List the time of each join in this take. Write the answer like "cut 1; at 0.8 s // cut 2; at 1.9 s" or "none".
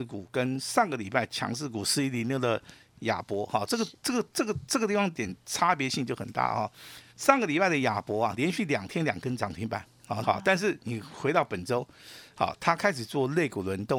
cut 1; at 7.1 s // cut 2; at 10.2 s